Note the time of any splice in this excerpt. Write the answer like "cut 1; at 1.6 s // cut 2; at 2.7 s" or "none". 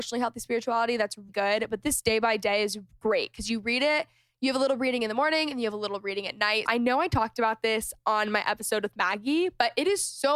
cut 1; at 1.3 s // cut 2; at 6.7 s